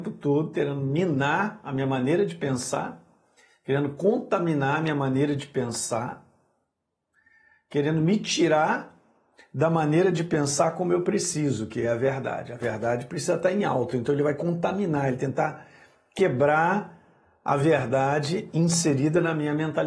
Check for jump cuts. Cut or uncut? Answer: uncut